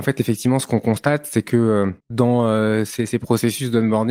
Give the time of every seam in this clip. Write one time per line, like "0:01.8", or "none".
0:02.0